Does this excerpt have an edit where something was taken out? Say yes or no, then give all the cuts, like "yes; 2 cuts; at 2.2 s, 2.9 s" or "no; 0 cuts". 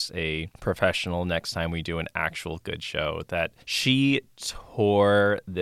yes; 1 cut; at 3.6 s